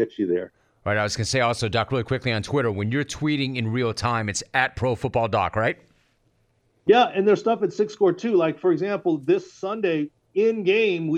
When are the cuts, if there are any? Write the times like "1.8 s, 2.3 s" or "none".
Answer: none